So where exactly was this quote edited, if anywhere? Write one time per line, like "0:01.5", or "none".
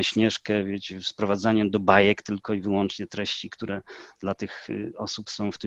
none

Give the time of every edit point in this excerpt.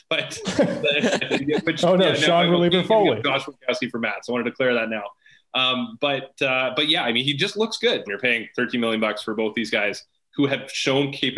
0:08.1

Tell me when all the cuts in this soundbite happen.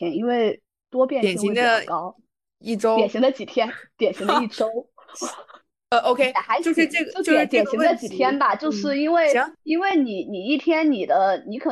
none

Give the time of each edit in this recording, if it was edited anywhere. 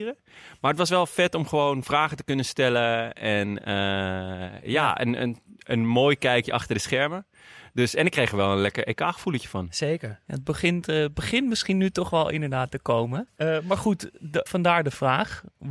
0:13.3
0:14.5

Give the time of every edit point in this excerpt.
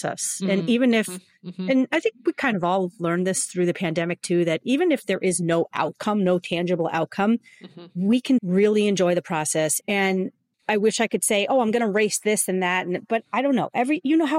0:08.4
0:09.8

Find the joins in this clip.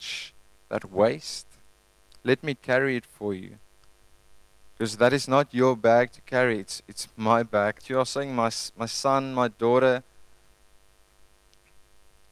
0:07.8

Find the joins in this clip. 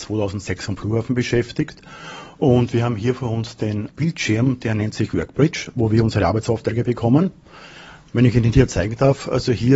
none

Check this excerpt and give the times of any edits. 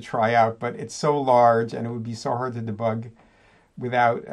none

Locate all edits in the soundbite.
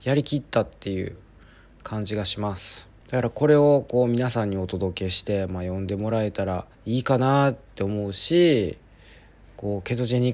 0:03.0
0:06.7

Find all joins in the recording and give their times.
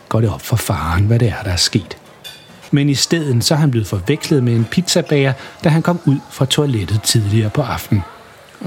0:02.7

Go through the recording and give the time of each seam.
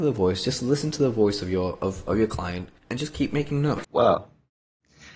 0:02.8
0:03.8

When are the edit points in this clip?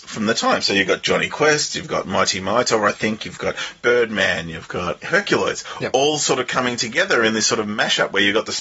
none

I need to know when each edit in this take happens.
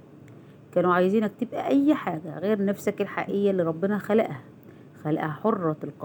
none

